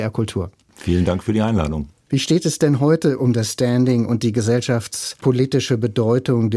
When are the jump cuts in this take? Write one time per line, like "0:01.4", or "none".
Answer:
0:02.1